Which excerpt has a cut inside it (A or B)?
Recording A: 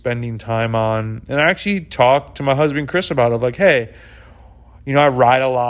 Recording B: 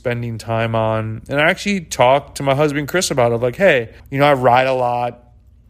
B